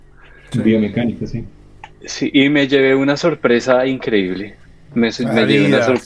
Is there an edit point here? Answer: no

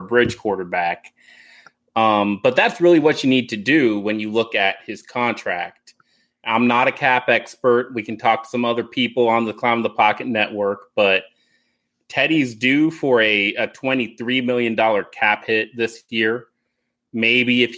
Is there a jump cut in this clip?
no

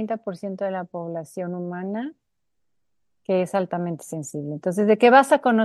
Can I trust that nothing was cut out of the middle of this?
yes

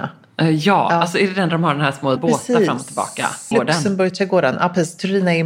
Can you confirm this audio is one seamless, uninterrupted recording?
no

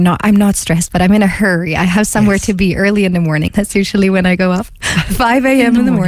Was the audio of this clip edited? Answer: yes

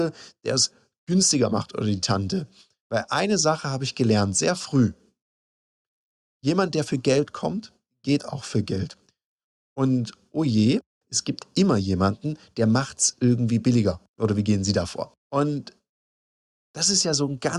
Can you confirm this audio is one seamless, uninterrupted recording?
no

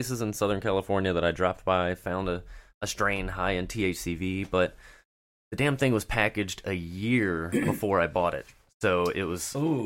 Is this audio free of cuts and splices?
yes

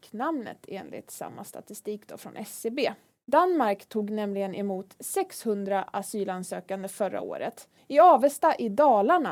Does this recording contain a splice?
yes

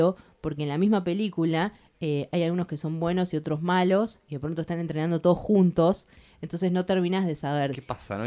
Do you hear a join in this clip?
no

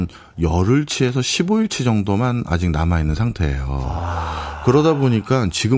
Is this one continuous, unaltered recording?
yes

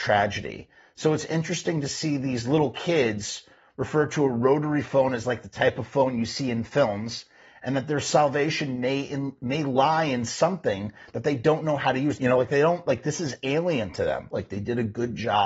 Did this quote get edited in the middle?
yes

